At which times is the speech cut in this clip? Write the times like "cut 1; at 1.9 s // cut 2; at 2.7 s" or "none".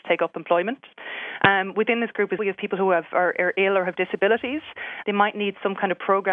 cut 1; at 2.4 s // cut 2; at 5.0 s